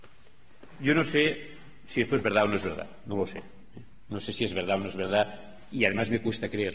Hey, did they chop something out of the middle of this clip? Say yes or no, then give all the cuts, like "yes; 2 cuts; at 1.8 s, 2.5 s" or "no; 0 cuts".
yes; 1 cut; at 5.7 s